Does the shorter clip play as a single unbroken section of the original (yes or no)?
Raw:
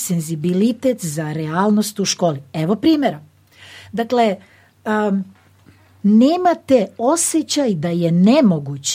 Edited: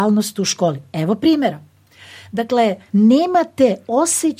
no